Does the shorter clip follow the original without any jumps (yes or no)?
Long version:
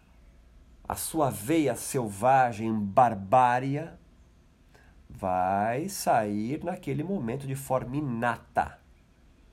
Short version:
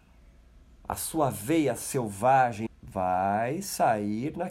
no